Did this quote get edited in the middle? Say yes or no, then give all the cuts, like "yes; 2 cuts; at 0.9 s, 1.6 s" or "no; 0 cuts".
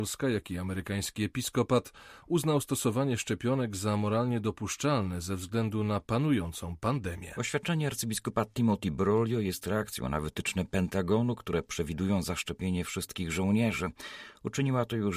no; 0 cuts